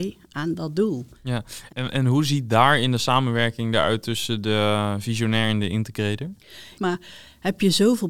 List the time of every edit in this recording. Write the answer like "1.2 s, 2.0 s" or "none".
1.7 s, 6.8 s